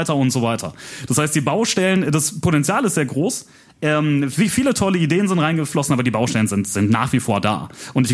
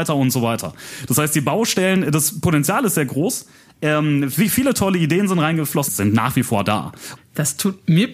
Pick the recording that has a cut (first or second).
second